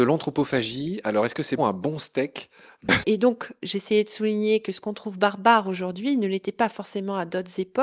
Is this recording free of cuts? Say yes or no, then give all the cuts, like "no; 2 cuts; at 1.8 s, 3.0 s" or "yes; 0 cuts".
no; 2 cuts; at 1.6 s, 3.0 s